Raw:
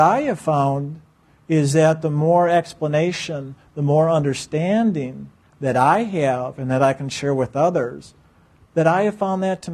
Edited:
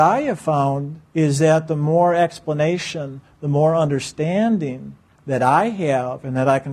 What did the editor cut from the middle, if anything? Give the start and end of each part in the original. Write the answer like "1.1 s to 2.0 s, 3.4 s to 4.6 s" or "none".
1.1 s to 1.4 s